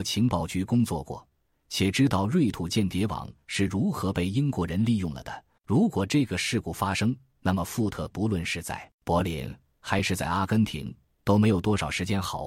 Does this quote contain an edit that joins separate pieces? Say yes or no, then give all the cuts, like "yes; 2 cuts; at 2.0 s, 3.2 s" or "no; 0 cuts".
yes; 2 cuts; at 5.6 s, 8.9 s